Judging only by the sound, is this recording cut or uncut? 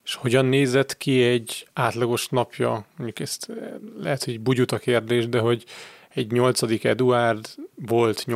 uncut